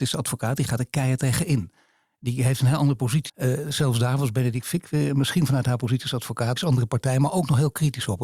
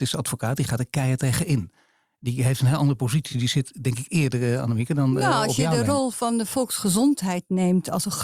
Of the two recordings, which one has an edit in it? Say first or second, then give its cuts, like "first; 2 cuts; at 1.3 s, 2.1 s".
first; 2 cuts; at 3.3 s, 6.6 s